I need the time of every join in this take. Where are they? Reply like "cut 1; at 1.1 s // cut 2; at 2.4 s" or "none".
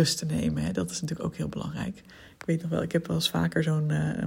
none